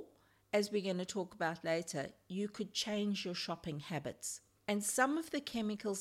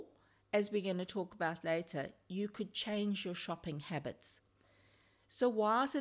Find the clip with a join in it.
first; 1 cut; at 4.6 s

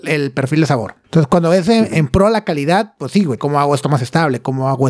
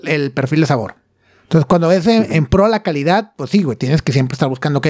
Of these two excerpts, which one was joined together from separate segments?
first; 2 cuts; at 1.0 s, 3.4 s

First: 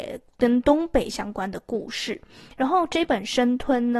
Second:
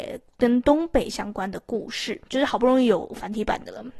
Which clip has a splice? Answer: second; 1 cut; at 2.3 s

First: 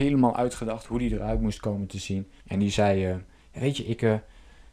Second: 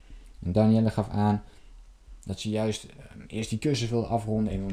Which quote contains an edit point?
first; 1 cut; at 2.4 s

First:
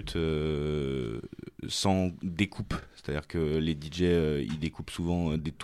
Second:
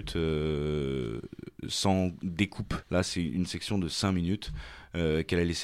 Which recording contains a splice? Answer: second; 1 cut; at 2.8 s

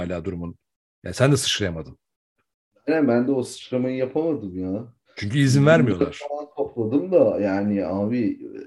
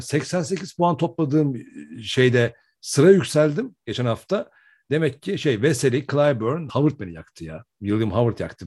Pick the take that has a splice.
second; 1 cut; at 6.7 s

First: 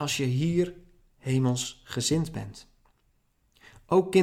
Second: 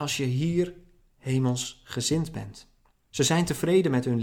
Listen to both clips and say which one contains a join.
second; 1 cut; at 2.9 s

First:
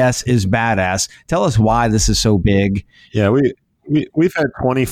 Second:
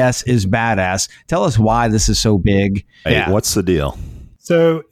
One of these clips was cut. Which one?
second; 1 cut; at 3.0 s

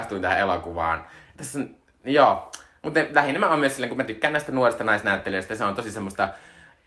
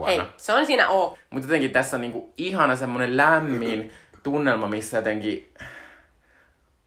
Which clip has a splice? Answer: second; 1 cut; at 1.1 s

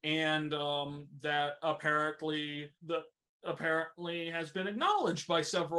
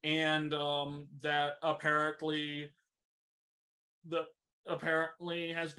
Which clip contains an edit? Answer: first; 1 cut; at 2.8 s

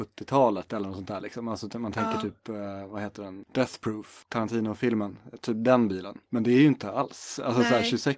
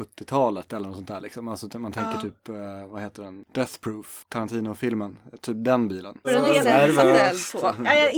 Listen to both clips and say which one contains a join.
second; 1 cut; at 6.2 s

